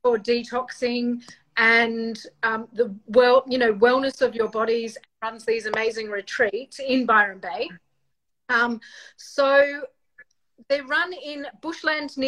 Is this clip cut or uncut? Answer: uncut